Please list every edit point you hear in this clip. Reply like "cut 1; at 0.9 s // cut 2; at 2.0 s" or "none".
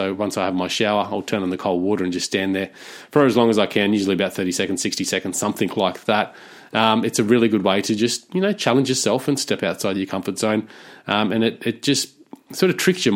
none